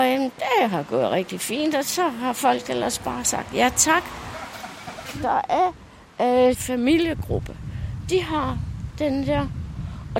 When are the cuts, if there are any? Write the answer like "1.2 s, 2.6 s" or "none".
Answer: 6.5 s